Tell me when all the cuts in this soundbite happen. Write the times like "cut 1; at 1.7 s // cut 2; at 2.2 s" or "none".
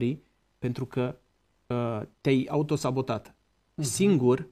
cut 1; at 2.1 s